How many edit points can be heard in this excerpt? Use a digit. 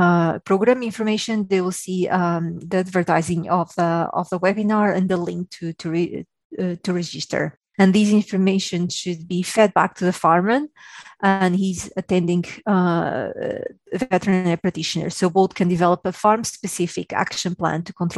1